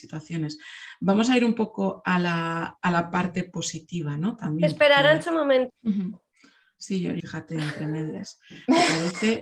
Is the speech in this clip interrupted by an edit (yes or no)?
yes